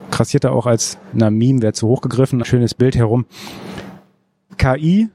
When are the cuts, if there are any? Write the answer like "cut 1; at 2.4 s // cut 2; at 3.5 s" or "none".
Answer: cut 1; at 2.4 s